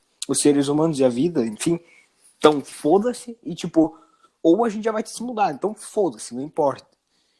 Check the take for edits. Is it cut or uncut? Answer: uncut